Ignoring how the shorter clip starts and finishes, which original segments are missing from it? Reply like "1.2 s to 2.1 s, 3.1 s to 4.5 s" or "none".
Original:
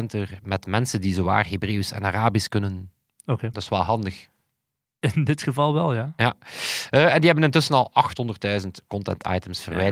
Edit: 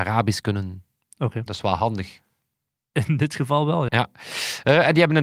6.0 s to 6.2 s